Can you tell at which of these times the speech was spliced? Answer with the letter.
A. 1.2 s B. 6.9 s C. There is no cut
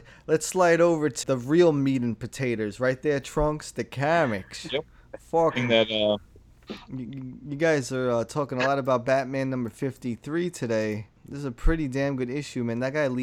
A